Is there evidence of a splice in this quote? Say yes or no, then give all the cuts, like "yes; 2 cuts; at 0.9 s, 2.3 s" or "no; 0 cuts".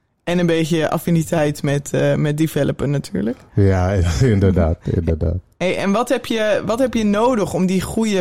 no; 0 cuts